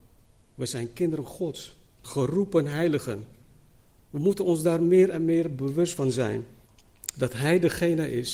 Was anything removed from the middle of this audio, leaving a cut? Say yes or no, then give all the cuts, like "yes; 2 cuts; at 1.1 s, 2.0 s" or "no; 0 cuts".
yes; 1 cut; at 2.0 s